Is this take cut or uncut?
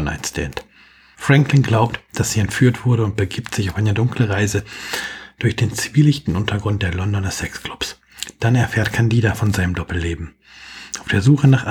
cut